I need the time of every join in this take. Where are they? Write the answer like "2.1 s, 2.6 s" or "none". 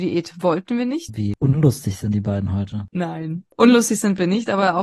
1.1 s